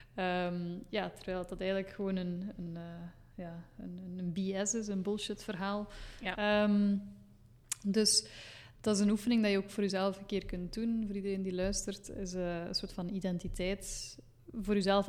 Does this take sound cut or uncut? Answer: cut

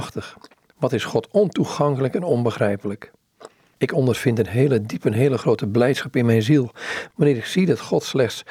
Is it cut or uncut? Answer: uncut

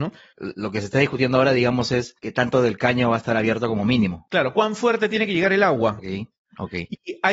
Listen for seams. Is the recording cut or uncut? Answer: cut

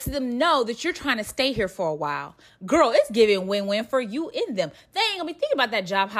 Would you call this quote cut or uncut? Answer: uncut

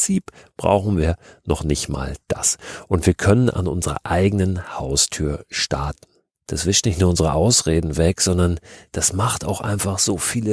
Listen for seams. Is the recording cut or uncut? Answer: uncut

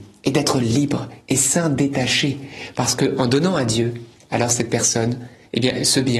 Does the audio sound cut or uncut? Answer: uncut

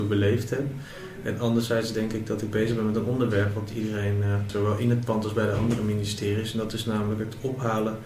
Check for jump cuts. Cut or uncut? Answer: cut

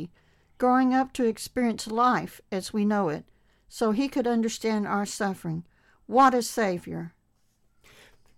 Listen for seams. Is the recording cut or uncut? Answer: uncut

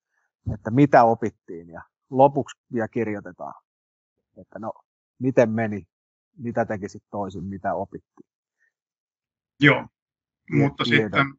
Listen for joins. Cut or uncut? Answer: cut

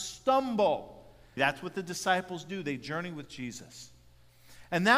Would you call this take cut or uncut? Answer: cut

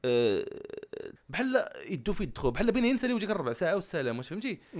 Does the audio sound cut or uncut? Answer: cut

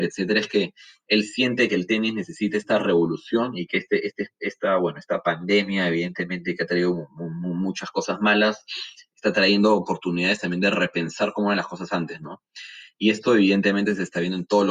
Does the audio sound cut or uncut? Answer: uncut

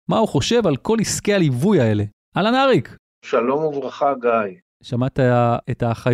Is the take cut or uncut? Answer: uncut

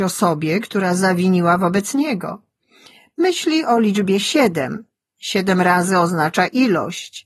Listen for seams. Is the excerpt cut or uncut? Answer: uncut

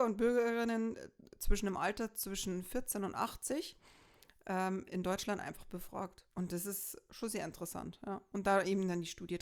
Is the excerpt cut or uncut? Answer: uncut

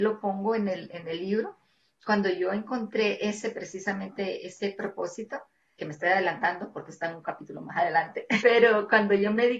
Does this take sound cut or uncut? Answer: cut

